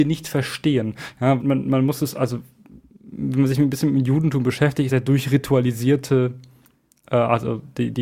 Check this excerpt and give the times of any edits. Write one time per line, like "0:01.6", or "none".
0:01.4
0:04.9